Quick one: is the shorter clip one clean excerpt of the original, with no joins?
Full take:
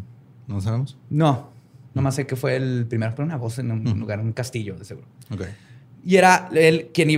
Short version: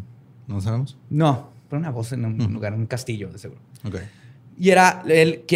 no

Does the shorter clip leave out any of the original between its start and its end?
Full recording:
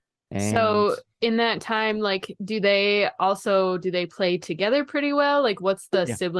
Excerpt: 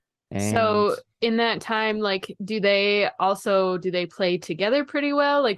no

